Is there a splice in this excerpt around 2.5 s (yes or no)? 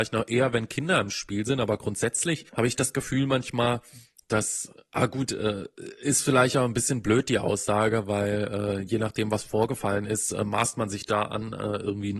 yes